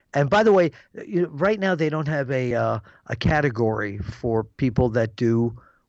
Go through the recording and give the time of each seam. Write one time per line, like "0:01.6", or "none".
none